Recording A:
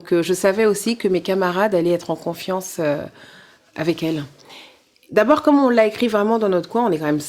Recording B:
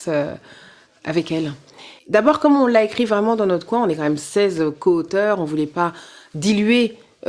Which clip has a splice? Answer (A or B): B